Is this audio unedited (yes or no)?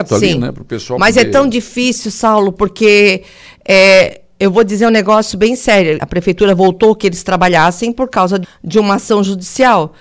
no